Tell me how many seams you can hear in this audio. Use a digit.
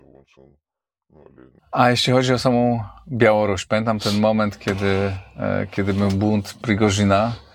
1